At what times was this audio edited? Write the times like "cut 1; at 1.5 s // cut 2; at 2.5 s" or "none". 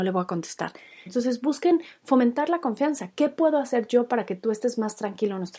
cut 1; at 1.1 s